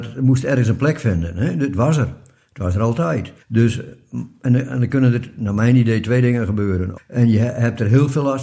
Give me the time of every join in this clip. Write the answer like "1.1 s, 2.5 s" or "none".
3.4 s, 7.0 s

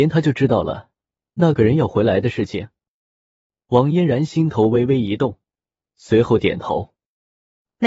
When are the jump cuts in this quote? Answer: none

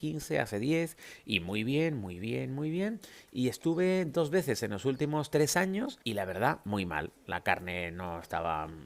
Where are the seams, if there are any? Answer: 6.0 s

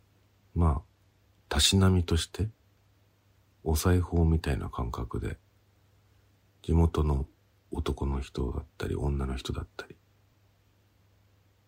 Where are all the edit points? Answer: 1.5 s

